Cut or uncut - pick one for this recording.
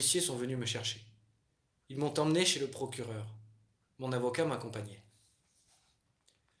uncut